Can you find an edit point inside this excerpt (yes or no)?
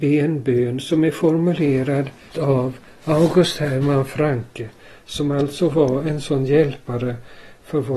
yes